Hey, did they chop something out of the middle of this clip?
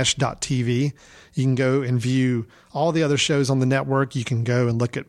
no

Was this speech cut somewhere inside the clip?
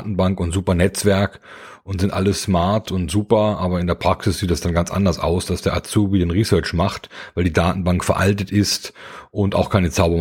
no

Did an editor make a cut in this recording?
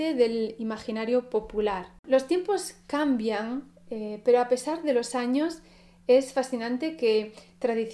yes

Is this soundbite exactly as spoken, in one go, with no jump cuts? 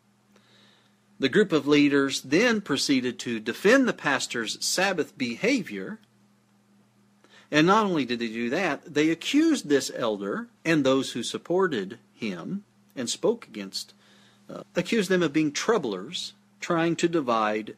no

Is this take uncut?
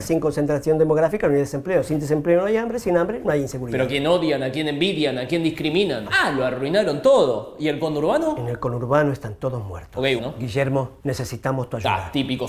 no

